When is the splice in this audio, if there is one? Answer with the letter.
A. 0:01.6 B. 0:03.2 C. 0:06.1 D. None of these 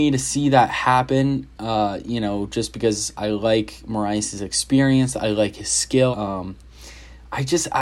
C